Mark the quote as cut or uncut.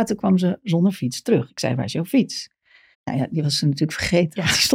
cut